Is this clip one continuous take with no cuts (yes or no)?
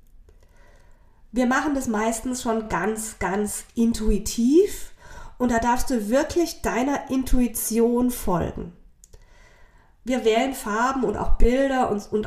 yes